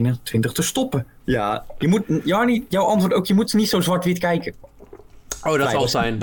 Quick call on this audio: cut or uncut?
cut